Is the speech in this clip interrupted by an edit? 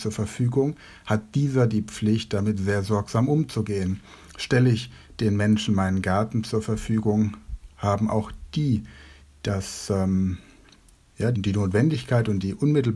yes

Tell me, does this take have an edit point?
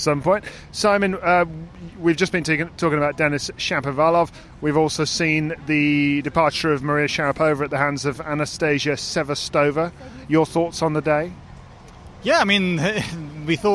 no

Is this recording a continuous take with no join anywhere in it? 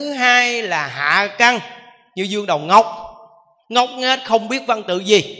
yes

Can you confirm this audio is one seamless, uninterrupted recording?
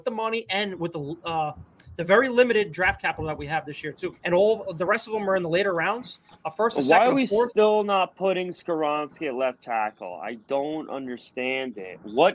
no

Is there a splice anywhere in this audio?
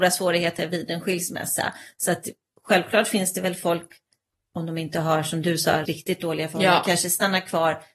yes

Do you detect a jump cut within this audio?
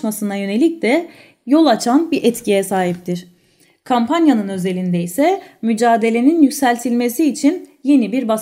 no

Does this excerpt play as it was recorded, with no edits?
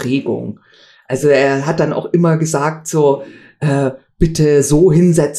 yes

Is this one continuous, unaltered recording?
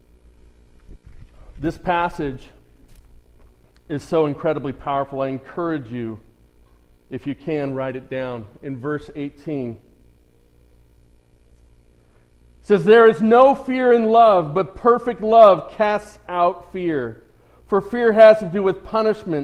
yes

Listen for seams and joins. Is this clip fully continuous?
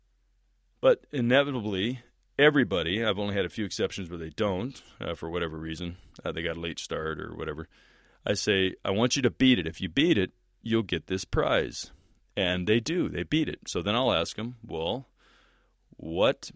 yes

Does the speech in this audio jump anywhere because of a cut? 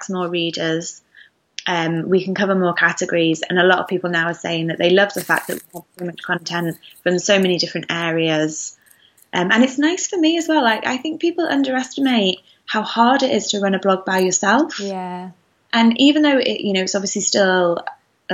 no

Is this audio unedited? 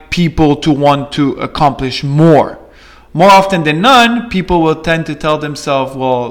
yes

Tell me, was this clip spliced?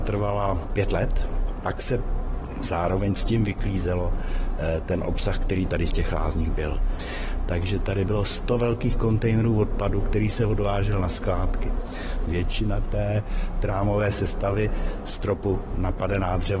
yes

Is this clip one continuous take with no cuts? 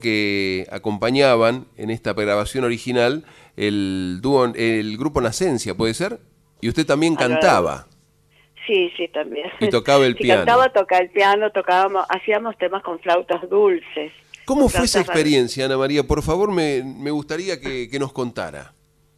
no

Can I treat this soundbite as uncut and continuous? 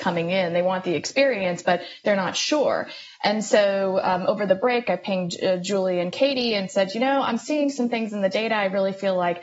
yes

